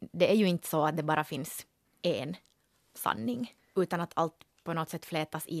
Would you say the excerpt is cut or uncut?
uncut